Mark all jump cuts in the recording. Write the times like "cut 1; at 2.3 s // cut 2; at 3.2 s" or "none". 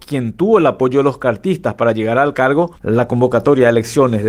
cut 1; at 2.7 s